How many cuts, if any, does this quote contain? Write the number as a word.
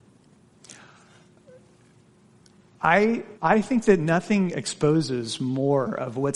one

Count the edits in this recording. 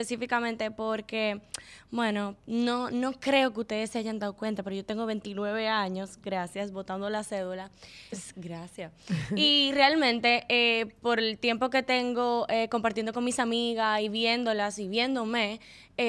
one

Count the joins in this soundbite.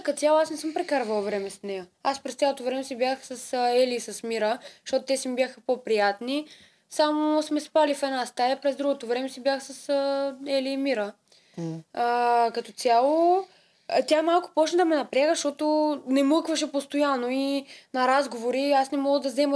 one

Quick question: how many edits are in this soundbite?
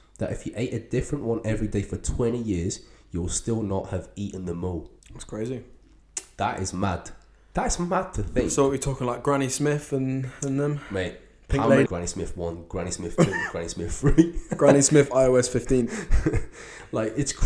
two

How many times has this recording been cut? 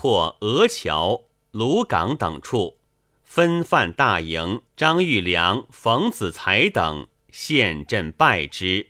two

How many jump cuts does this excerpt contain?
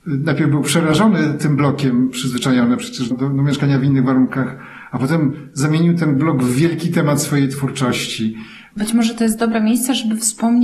two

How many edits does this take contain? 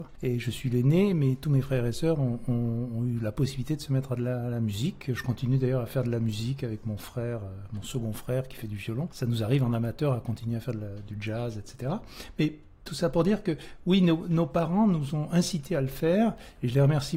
zero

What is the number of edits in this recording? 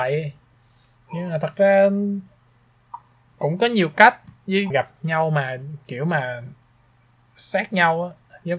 one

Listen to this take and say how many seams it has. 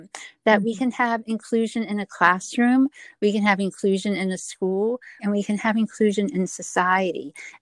one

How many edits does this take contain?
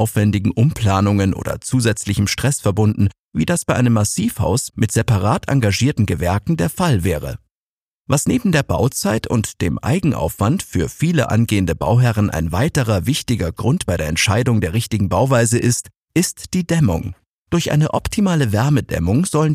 zero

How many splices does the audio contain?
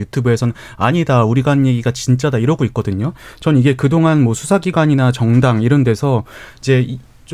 zero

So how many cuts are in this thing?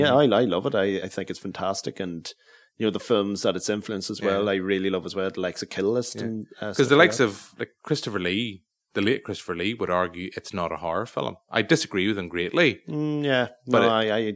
zero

